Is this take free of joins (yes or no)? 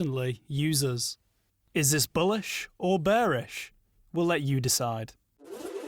yes